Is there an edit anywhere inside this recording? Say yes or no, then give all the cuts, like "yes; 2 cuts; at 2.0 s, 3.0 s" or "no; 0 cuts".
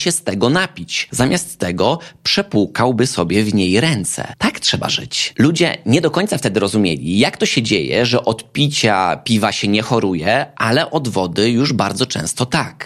no; 0 cuts